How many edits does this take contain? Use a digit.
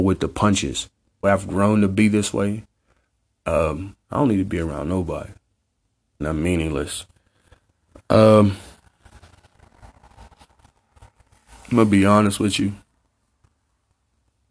3